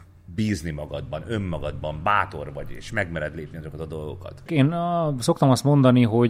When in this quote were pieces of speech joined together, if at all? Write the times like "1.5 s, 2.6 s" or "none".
4.5 s